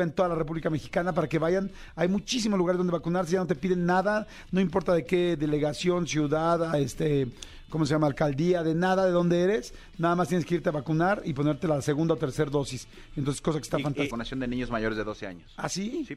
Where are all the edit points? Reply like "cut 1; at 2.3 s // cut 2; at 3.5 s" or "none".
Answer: cut 1; at 14.1 s